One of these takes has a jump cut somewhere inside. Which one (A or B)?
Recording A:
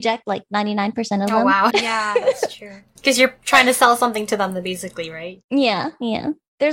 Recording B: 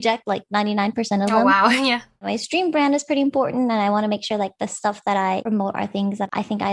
A